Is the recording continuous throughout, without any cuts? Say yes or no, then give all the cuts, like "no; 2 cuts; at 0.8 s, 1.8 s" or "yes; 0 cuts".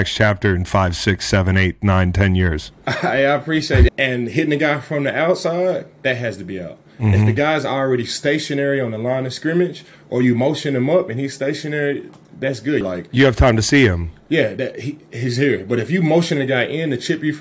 no; 2 cuts; at 3.9 s, 12.8 s